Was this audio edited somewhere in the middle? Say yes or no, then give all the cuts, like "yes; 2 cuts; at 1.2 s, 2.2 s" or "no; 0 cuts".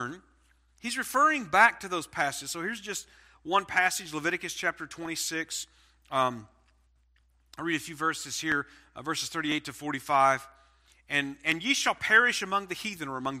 no; 0 cuts